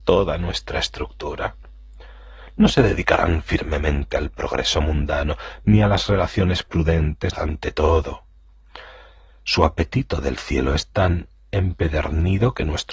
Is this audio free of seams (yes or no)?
no